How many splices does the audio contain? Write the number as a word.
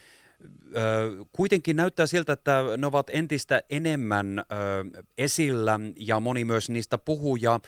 one